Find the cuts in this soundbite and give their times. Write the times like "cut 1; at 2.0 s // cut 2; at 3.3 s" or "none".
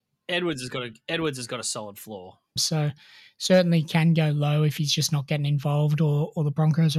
cut 1; at 2.6 s